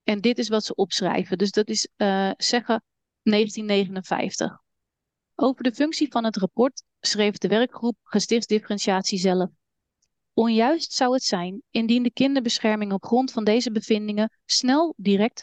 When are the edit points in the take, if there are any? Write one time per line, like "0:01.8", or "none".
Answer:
none